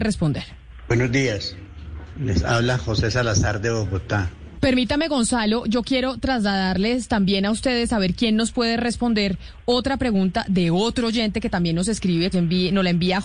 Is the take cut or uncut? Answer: cut